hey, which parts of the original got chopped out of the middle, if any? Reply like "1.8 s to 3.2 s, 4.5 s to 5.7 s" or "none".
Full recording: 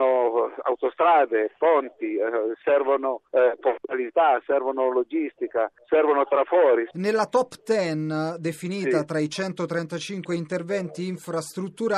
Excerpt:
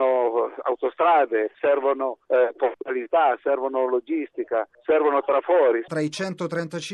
1.5 s to 2.6 s, 6.9 s to 9.1 s